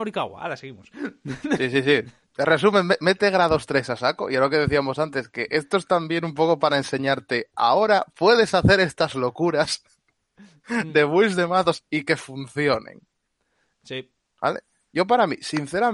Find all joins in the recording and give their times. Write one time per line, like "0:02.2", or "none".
none